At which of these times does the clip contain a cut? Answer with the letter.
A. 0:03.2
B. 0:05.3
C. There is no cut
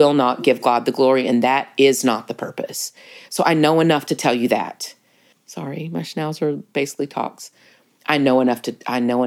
B